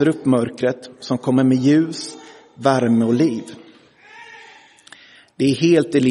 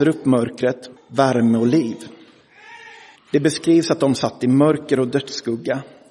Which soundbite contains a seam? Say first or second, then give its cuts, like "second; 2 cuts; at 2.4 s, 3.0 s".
second; 2 cuts; at 1.0 s, 3.2 s